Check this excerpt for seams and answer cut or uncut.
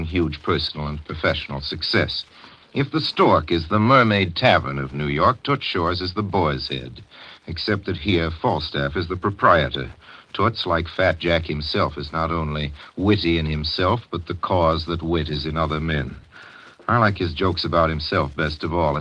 uncut